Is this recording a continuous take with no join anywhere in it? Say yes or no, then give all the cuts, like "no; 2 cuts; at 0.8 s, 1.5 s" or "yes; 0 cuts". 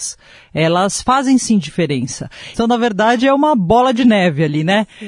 no; 1 cut; at 2.5 s